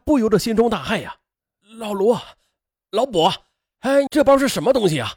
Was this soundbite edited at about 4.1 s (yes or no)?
yes